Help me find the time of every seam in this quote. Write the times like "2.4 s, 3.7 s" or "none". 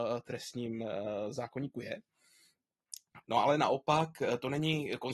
3.2 s